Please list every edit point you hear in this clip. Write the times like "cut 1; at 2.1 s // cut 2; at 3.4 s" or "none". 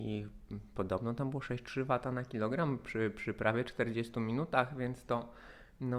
none